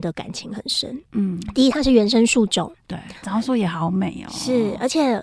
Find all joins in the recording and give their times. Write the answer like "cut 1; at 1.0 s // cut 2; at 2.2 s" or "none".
cut 1; at 1.0 s // cut 2; at 3.2 s